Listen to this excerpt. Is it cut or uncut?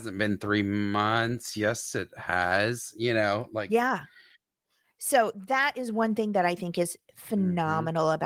uncut